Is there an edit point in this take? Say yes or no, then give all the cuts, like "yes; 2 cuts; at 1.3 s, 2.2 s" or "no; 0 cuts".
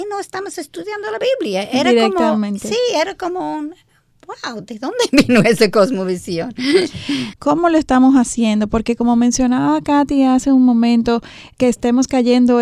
yes; 2 cuts; at 7.3 s, 11.5 s